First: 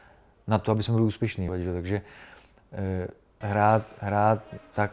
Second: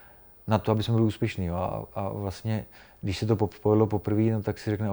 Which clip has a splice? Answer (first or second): first